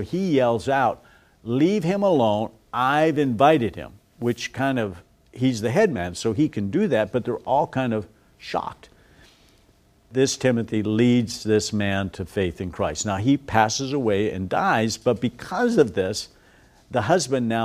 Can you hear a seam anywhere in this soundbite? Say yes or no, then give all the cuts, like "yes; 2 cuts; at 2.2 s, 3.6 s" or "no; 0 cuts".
no; 0 cuts